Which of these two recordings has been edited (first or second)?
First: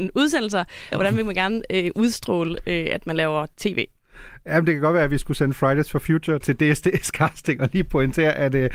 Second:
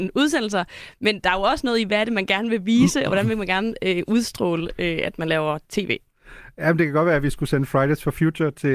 first